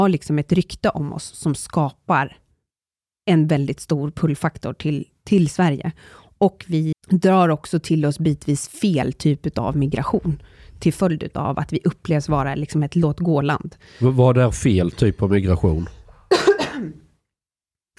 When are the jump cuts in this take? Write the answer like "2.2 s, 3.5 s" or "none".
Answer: 6.9 s